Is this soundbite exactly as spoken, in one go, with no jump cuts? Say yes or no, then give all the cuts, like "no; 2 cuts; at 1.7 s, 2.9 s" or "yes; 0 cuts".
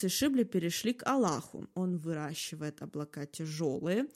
no; 1 cut; at 1.7 s